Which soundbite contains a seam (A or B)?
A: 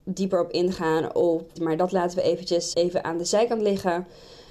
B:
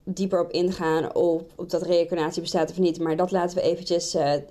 A